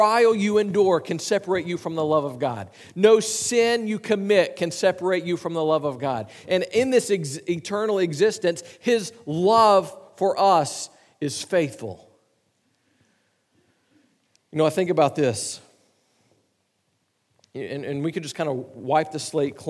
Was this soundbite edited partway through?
yes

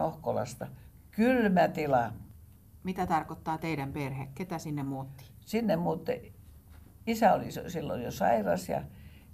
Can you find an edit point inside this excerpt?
no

